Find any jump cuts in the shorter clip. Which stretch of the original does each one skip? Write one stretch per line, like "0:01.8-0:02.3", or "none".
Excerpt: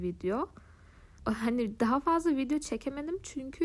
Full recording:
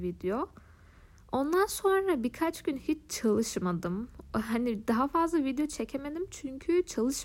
0:01.2-0:04.3